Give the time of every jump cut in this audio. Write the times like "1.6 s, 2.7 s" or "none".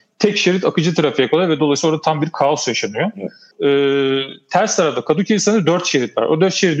3.5 s